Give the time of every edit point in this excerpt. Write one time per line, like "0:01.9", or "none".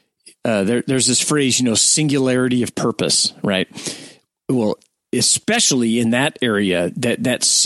none